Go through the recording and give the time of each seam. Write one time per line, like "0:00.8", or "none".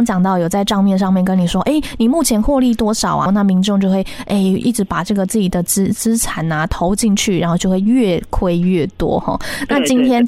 0:03.3